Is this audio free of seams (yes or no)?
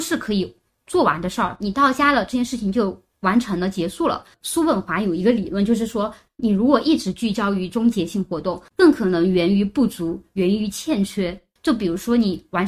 no